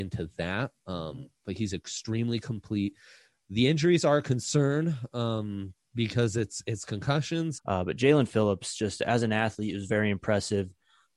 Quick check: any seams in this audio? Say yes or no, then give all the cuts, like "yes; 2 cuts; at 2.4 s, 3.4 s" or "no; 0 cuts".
yes; 1 cut; at 7.6 s